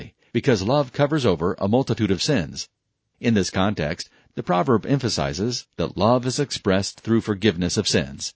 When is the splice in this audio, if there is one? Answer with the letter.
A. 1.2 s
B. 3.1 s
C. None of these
C